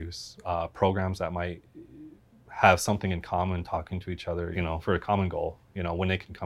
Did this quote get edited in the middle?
yes; 1 cut; at 4.5 s

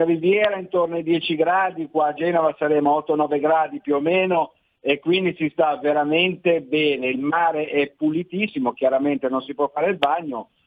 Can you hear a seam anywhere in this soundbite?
no; 0 cuts

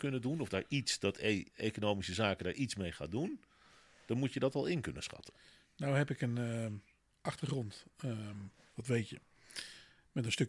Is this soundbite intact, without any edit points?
no; 1 cut; at 1.5 s

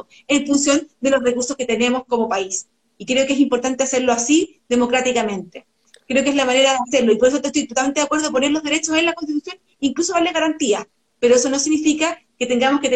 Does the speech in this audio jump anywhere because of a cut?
no; 0 cuts

